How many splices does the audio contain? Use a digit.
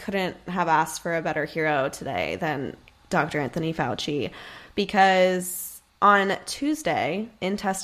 1